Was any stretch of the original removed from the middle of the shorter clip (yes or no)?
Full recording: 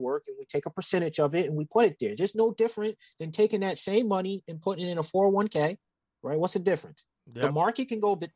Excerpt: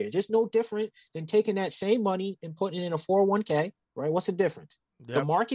yes